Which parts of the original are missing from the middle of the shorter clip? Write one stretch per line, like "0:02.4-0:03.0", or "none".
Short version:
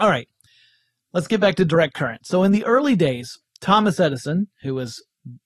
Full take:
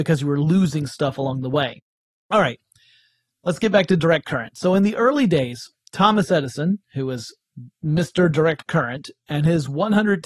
none